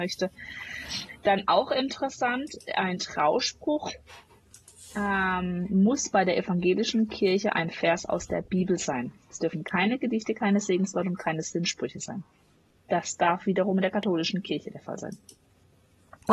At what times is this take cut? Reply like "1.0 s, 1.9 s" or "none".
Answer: none